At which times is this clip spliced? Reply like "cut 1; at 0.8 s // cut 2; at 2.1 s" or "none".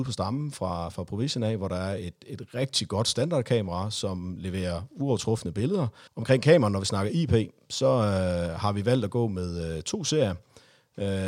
cut 1; at 6.1 s